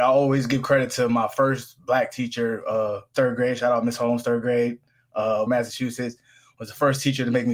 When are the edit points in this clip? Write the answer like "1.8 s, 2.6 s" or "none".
3.1 s, 5.5 s